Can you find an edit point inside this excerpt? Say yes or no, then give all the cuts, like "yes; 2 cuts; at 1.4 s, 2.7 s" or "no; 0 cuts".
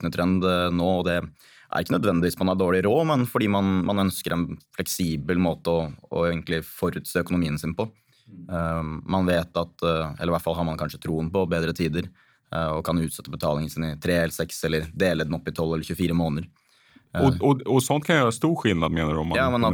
no; 0 cuts